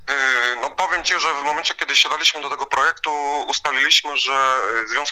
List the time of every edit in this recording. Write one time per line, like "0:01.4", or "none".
none